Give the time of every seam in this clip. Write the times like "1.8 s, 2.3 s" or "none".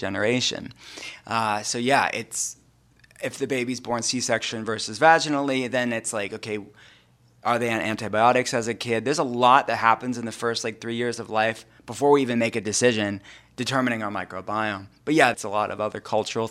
15.3 s